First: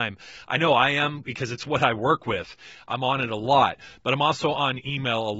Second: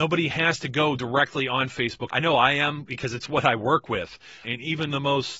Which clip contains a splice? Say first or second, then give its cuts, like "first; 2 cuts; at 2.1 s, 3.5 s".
second; 2 cuts; at 2.1 s, 4.4 s